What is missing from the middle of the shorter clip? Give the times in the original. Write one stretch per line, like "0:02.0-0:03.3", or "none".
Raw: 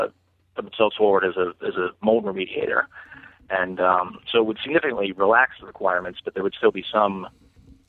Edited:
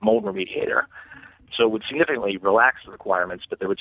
0:03.5-0:04.2